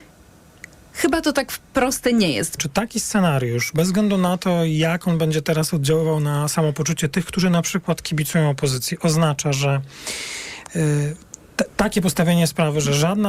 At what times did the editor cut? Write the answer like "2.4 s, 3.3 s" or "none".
2.6 s